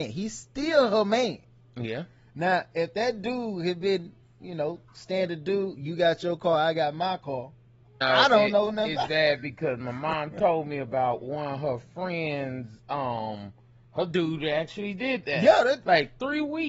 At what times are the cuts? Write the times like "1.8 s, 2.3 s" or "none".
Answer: 8.0 s